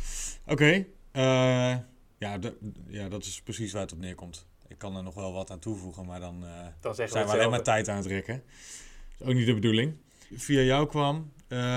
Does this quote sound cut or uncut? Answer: cut